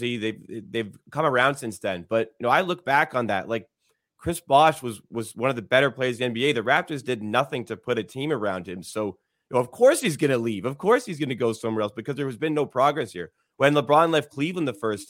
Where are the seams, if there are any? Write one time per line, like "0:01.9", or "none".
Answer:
none